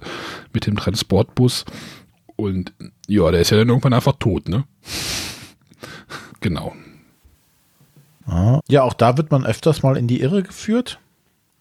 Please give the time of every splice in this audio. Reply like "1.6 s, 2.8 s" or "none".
6.3 s, 8.6 s